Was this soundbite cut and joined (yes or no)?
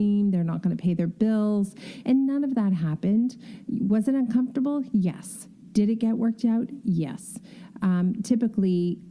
yes